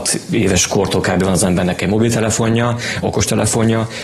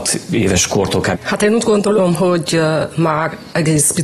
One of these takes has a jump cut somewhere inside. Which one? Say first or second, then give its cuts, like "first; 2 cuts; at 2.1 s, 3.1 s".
second; 1 cut; at 1.1 s